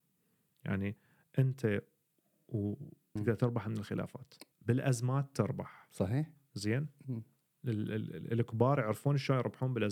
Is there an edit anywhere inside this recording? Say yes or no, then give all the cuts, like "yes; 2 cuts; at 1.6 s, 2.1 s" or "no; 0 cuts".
yes; 2 cuts; at 3.2 s, 4.5 s